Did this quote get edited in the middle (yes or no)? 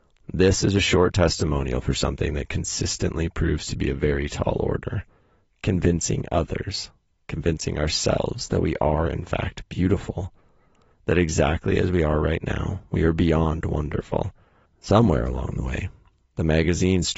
yes